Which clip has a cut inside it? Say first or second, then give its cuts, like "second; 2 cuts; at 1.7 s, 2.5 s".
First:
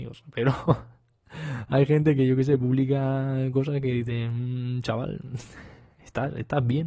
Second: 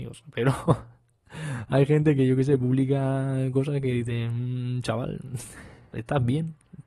second; 1 cut; at 5.9 s